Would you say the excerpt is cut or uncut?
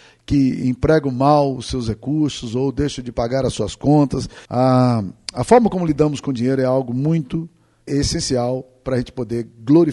cut